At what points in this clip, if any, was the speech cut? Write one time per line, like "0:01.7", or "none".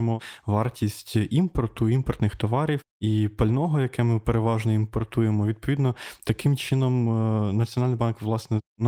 none